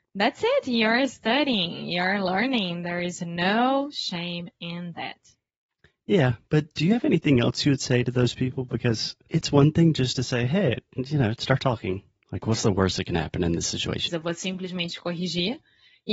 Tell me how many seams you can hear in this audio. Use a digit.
1